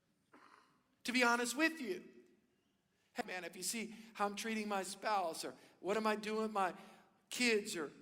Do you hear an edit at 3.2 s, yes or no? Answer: yes